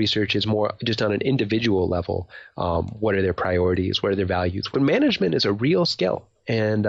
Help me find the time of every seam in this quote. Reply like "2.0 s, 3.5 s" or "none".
4.7 s